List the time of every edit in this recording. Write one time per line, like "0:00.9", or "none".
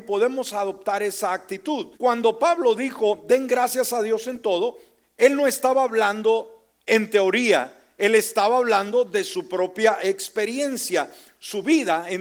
0:01.9

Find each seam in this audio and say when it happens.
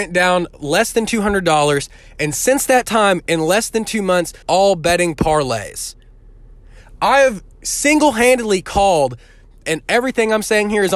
0:04.4
0:09.6

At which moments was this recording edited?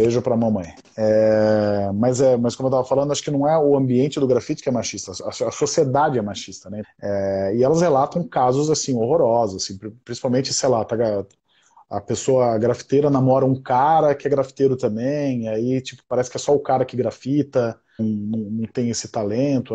0:06.8
0:18.0

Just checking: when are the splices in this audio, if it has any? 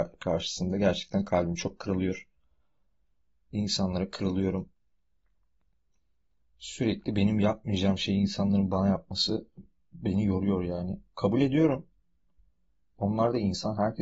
none

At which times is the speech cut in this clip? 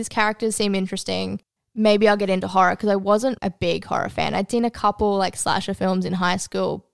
0:03.4

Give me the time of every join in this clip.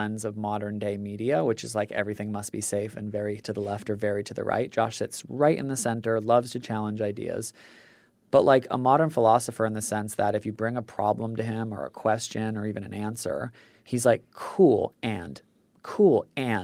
none

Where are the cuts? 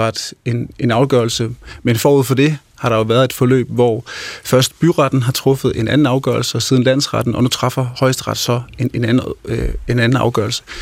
none

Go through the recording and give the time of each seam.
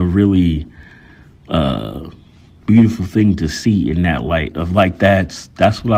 none

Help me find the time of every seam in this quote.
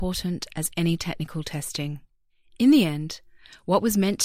none

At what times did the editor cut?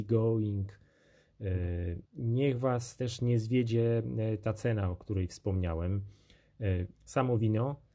0:02.0
0:06.9

